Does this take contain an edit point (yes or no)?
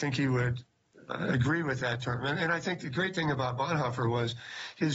no